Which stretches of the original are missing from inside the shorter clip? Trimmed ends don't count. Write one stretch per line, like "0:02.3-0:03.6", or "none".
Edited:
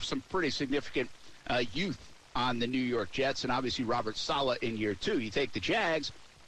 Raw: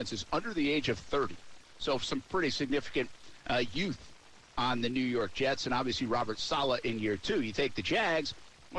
0:04.3-0:04.5